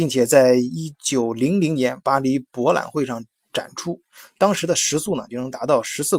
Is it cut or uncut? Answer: uncut